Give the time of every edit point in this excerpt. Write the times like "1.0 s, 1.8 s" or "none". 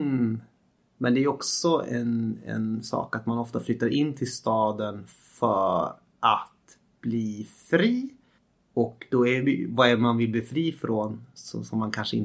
none